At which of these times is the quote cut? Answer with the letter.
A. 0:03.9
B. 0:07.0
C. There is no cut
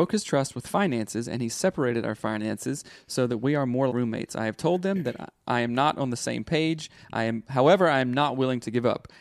A